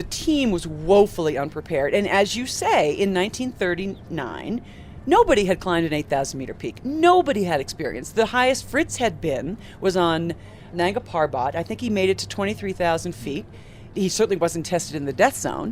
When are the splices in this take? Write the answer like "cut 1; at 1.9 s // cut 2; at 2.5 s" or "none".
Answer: none